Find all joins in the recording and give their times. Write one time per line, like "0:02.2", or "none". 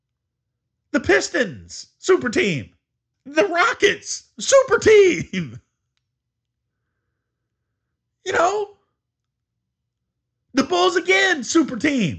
0:03.1